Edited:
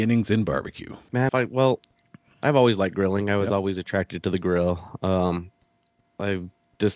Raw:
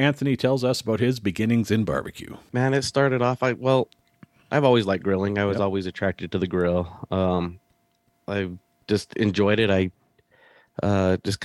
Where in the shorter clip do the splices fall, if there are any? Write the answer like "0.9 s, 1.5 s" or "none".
1.3 s

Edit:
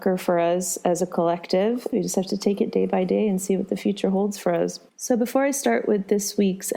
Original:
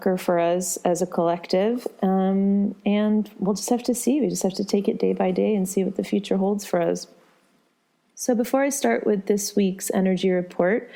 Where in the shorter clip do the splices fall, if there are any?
1.9 s, 4.9 s

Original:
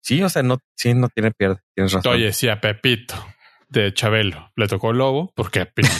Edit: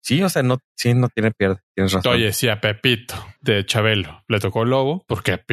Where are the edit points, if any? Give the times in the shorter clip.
3.4 s

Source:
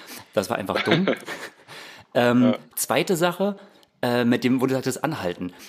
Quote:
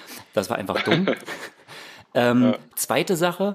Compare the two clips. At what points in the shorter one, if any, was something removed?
none

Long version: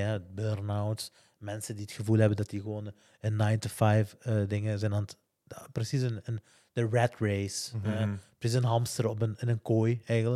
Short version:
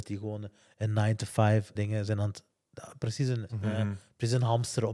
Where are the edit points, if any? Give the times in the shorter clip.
1.7 s, 3.5 s

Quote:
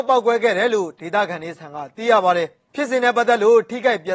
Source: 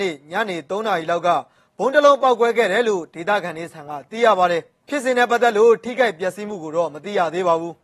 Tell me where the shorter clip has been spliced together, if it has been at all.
none

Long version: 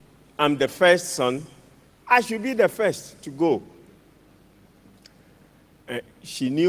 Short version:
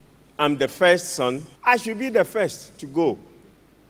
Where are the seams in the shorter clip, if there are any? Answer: 1.6 s

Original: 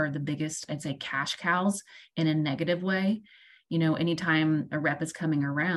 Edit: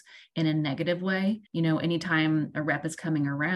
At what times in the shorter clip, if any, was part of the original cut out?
1.5 s

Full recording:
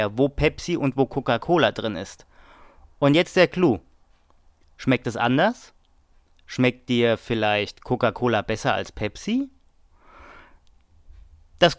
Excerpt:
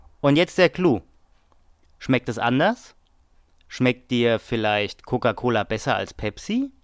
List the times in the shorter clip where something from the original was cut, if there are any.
none

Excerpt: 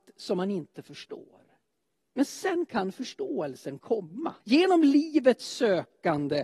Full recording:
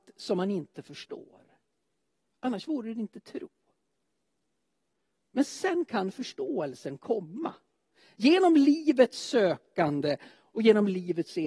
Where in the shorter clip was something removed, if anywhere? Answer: 2.1 s, 4.4 s

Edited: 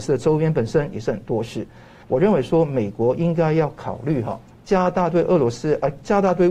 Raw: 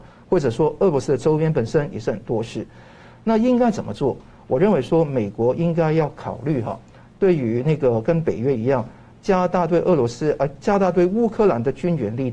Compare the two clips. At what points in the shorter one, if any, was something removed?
2.0 s, 4.5 s

